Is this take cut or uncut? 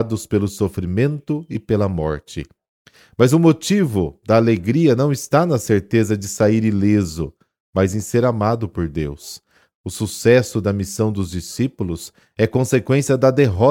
cut